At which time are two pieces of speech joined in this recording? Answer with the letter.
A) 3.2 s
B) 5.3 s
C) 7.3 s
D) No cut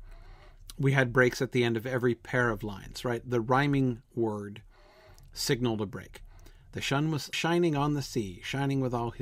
C